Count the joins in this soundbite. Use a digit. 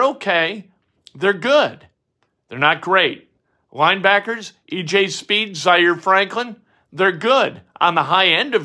0